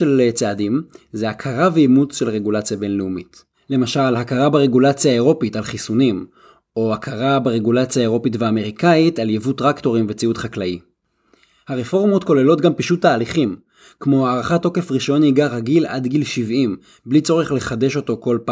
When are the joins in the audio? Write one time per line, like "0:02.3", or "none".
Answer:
none